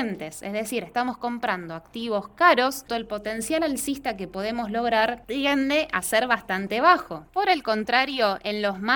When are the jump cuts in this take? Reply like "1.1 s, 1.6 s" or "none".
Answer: 2.9 s